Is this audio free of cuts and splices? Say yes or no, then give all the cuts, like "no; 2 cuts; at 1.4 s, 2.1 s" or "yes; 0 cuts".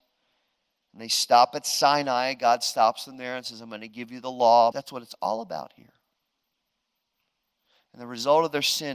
no; 1 cut; at 4.7 s